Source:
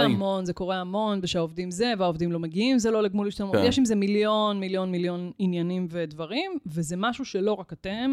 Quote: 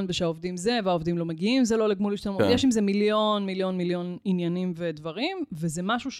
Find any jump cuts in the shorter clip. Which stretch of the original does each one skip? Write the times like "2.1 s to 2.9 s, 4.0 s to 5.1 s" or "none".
none